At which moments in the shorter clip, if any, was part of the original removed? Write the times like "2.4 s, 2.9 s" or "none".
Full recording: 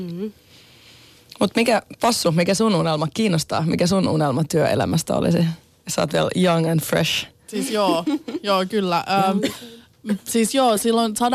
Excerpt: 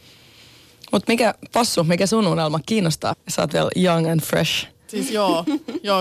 3.1 s